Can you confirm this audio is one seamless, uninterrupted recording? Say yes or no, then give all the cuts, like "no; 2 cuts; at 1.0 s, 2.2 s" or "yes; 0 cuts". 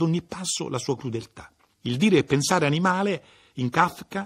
no; 1 cut; at 1.7 s